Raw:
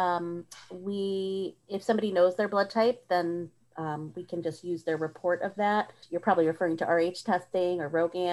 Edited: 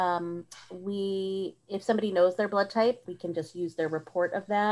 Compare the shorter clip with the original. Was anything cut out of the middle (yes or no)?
yes